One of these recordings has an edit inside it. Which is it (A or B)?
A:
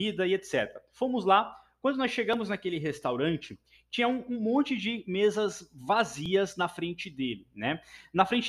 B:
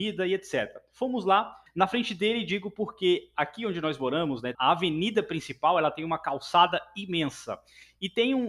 B